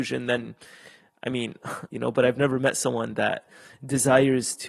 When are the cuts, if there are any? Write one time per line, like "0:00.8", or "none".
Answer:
0:01.9

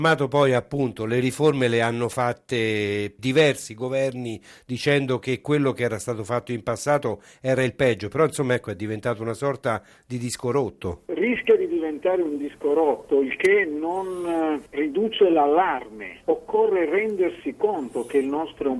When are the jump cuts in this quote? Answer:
none

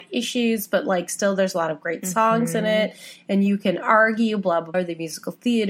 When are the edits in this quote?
0:04.7

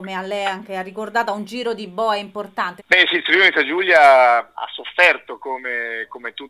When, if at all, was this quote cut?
0:02.8
0:04.5

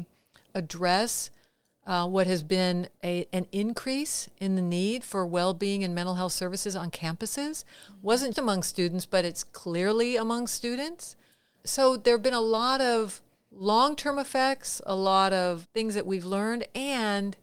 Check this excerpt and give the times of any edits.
0:08.3

